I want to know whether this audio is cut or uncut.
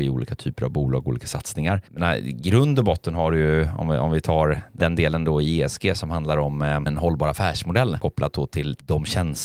uncut